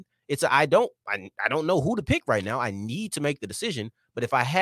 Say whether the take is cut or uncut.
uncut